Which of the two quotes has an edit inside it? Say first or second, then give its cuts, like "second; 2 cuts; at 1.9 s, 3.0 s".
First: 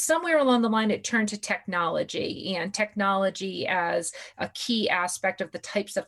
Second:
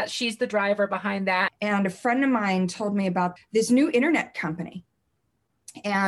second; 2 cuts; at 1.5 s, 3.4 s